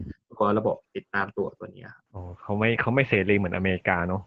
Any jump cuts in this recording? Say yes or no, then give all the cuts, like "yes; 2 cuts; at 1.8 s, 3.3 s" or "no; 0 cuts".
yes; 1 cut; at 2.1 s